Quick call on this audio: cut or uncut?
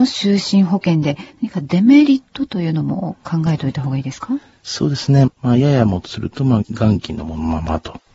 cut